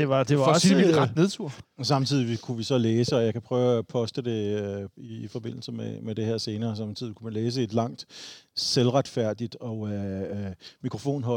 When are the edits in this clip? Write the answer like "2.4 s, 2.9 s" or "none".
1.6 s